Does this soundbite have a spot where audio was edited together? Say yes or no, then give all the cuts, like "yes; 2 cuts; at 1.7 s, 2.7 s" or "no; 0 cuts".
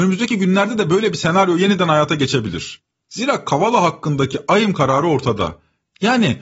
no; 0 cuts